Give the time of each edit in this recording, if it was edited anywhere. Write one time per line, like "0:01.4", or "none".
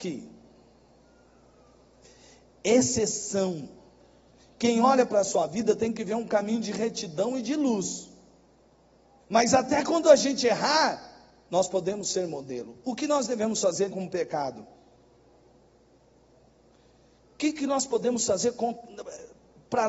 0:09.2
0:13.9